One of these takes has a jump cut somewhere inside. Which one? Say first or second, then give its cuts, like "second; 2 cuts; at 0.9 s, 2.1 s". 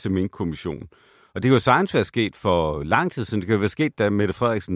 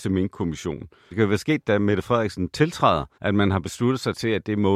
second; 2 cuts; at 1.1 s, 3.1 s